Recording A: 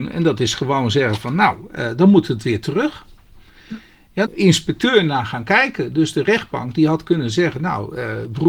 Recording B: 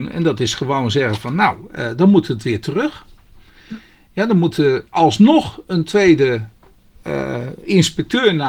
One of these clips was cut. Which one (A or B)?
A